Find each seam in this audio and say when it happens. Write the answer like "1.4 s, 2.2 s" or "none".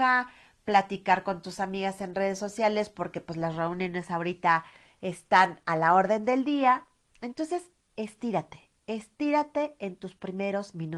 none